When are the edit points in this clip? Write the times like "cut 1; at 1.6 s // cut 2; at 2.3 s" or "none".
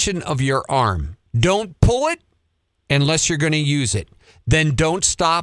cut 1; at 1.3 s